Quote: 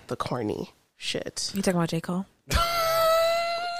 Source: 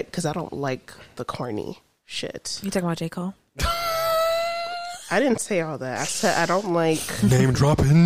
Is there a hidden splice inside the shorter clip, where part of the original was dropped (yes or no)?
no